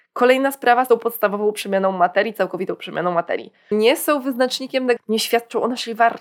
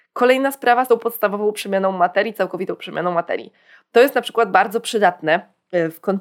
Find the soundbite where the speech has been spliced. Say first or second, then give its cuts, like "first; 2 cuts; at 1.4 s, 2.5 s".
first; 2 cuts; at 3.7 s, 5.0 s